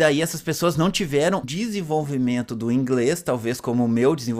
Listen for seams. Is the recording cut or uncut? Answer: cut